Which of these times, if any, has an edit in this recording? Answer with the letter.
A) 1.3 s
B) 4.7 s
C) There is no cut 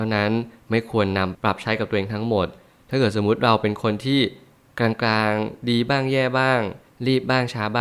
A